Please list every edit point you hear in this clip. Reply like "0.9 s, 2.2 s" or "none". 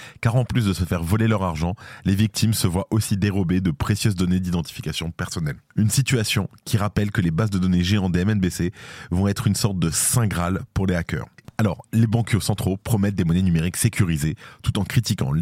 11.4 s